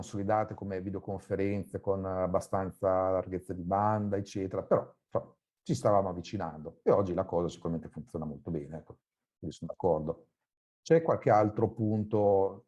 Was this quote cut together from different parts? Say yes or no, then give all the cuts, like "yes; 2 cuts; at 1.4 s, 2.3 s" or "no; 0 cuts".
no; 0 cuts